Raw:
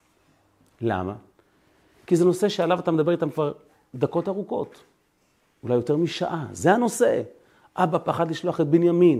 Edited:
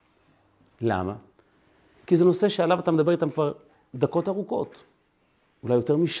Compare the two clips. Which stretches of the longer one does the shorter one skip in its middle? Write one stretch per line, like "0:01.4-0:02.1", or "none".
none